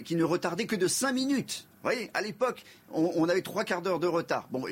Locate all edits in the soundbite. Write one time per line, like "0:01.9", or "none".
none